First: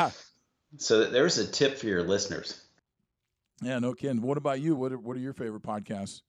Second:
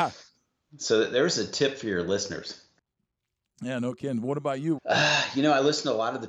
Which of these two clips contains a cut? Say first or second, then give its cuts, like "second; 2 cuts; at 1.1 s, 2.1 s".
second; 1 cut; at 4.8 s